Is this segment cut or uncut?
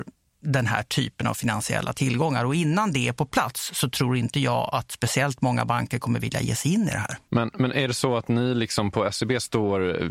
uncut